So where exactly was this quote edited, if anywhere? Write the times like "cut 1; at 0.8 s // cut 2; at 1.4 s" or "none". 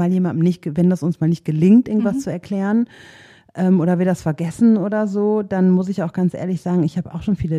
none